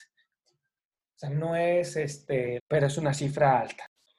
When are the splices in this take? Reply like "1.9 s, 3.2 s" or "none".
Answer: 2.6 s